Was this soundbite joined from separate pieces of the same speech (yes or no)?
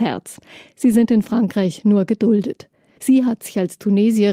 yes